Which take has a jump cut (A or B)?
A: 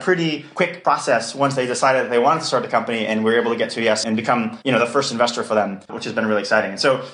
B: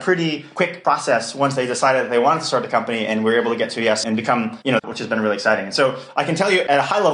B